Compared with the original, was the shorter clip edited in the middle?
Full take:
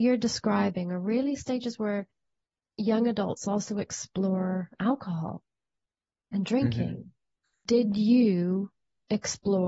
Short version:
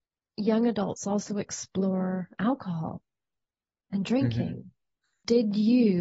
no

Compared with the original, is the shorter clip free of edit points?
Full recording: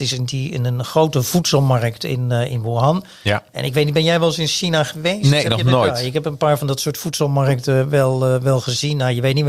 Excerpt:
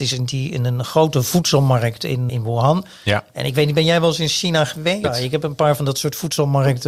no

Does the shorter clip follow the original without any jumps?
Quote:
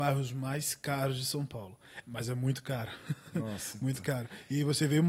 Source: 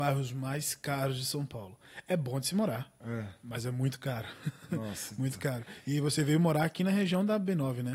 no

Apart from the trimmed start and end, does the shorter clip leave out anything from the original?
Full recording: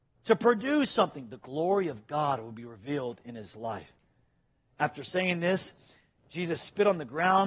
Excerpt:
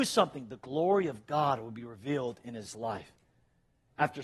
no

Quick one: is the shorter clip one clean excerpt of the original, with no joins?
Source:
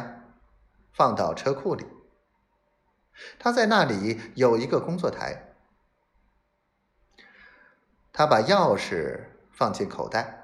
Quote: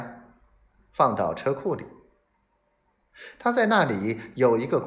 yes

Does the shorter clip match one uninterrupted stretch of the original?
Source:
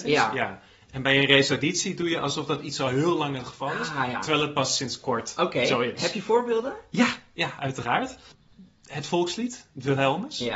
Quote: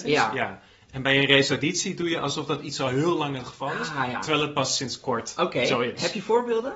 yes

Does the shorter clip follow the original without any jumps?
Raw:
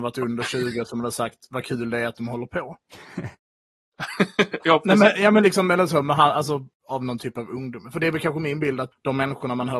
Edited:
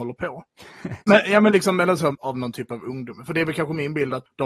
no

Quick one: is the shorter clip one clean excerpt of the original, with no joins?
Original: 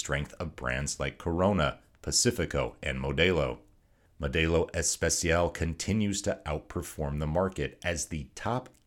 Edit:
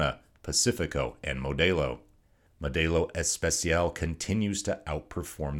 yes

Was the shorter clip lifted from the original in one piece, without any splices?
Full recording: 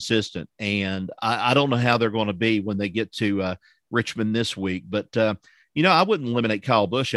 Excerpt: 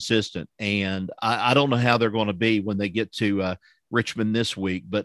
yes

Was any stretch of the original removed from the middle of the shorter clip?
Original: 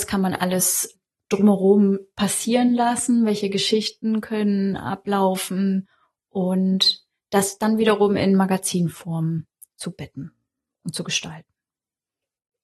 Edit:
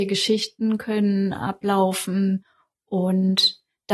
no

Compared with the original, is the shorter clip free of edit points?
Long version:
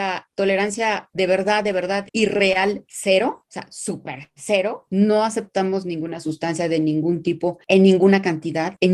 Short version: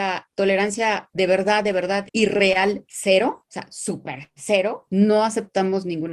yes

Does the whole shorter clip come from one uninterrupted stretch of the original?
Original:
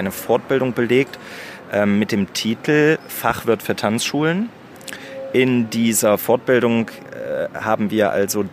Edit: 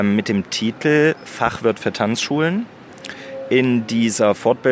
yes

